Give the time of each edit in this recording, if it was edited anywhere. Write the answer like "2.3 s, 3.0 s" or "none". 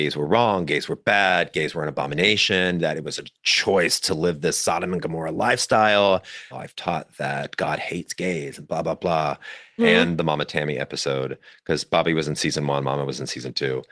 6.5 s, 9.8 s